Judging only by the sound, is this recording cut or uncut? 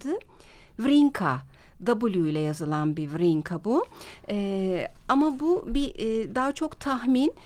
uncut